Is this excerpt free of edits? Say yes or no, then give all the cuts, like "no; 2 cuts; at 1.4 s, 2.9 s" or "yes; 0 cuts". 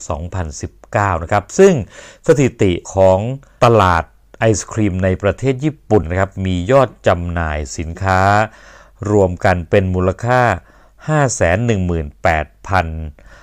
no; 1 cut; at 6.0 s